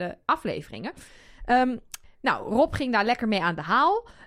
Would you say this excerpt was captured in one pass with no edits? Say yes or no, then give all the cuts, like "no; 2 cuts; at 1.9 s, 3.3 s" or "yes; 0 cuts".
yes; 0 cuts